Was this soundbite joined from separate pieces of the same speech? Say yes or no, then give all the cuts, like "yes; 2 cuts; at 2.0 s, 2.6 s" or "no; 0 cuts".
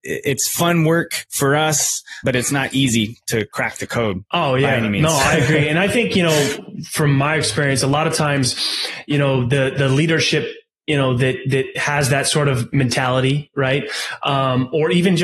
yes; 1 cut; at 2.2 s